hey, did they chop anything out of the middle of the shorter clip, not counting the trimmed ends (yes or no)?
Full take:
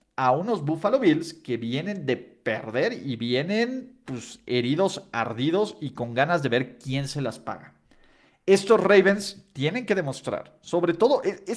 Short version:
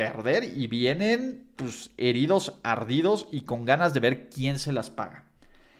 no